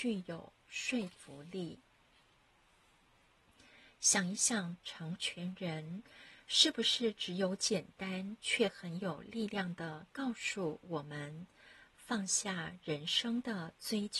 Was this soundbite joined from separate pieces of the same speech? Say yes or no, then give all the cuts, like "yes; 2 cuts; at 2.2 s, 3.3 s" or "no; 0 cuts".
yes; 1 cut; at 4.8 s